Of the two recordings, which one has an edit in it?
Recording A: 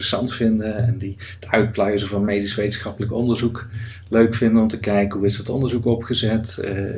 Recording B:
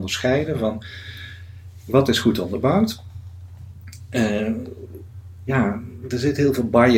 B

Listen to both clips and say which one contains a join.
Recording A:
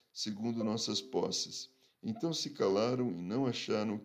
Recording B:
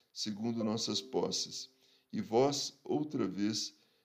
A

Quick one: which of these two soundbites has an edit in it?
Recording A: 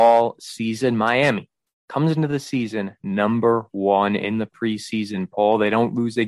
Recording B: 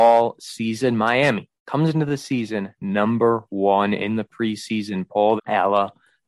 B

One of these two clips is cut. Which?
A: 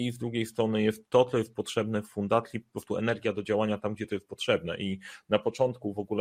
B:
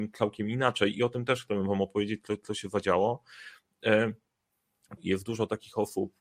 B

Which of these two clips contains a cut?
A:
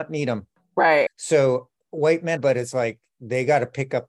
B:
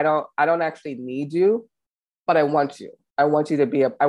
A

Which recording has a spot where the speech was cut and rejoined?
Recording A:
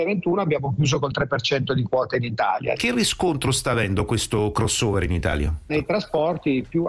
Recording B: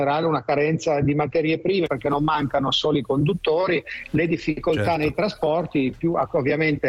A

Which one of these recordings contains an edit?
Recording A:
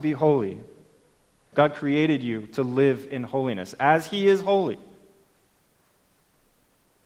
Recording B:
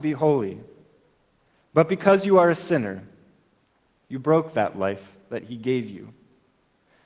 A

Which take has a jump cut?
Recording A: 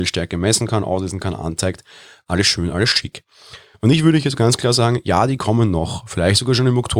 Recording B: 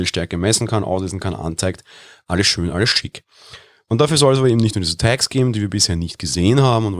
A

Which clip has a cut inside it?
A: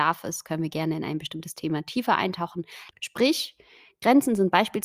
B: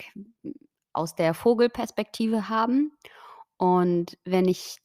A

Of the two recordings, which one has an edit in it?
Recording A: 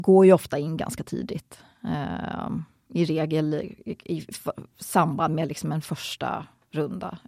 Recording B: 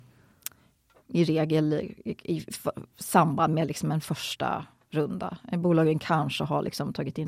B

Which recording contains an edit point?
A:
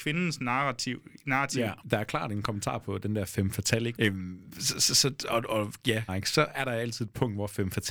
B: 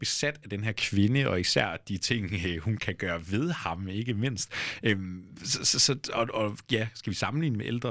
A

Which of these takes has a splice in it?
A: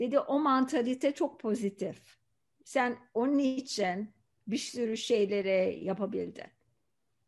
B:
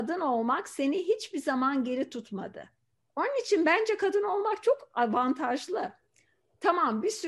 B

